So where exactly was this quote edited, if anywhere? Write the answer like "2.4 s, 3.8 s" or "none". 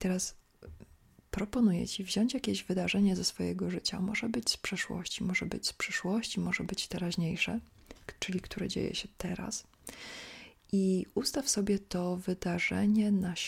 none